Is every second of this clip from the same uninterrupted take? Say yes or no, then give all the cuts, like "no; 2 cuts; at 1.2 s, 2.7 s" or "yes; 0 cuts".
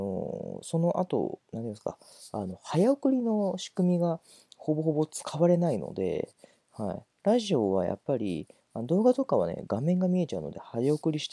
yes; 0 cuts